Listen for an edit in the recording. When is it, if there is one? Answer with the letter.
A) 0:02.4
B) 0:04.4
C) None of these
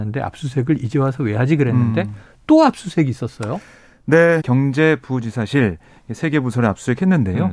B